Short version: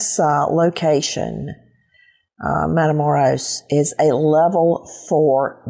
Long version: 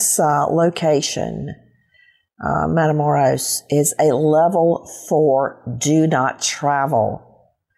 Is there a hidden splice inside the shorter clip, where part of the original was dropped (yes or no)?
no